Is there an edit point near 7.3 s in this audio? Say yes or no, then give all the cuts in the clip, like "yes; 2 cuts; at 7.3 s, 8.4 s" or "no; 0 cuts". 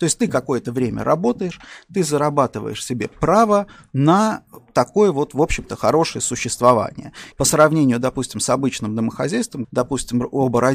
yes; 2 cuts; at 7.3 s, 9.6 s